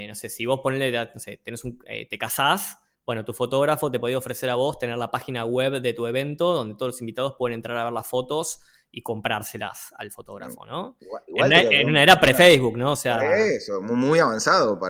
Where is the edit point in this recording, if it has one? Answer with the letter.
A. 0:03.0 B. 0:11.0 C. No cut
C